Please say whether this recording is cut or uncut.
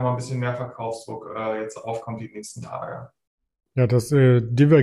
uncut